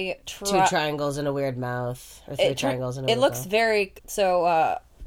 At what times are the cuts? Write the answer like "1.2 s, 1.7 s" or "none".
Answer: 4.0 s